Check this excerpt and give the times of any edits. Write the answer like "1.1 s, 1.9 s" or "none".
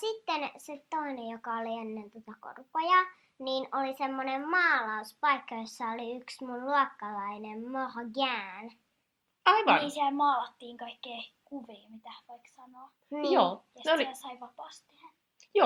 none